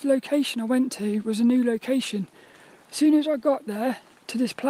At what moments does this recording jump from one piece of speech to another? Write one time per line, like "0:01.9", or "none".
0:02.8